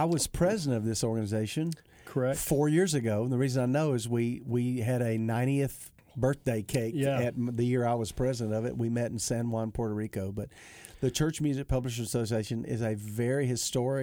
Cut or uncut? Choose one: uncut